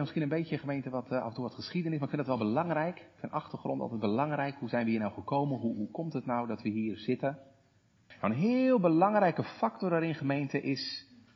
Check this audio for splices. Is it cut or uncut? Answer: cut